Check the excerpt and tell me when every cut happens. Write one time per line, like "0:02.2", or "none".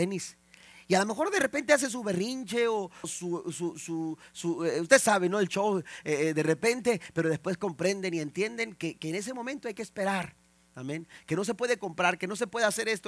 0:03.0